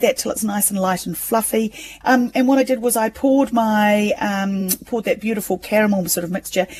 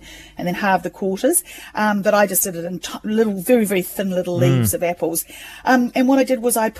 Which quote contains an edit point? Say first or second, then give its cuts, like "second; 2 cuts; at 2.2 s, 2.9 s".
first; 1 cut; at 2.0 s